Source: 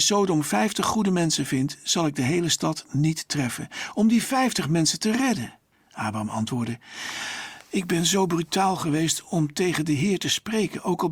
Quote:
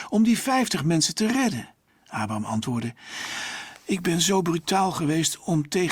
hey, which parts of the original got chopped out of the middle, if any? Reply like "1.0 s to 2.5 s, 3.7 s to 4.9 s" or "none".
none